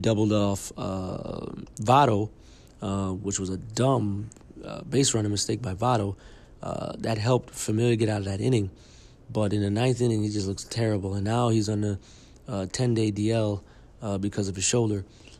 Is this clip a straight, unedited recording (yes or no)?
yes